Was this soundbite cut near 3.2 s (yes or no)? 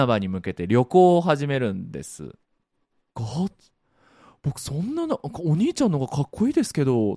yes